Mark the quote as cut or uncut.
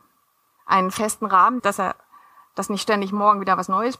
cut